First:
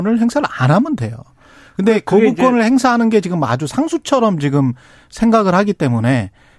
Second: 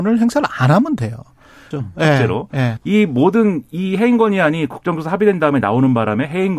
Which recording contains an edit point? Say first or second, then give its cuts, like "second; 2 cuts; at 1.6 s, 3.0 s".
second; 2 cuts; at 1.7 s, 2.8 s